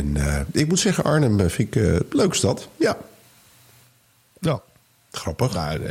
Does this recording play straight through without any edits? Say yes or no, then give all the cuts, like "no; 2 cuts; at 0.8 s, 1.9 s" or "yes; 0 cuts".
yes; 0 cuts